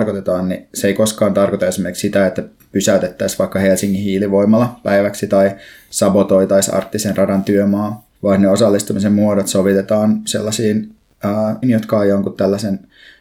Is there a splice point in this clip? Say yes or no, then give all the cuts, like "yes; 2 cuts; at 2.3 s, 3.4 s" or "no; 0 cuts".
yes; 2 cuts; at 8.2 s, 11.6 s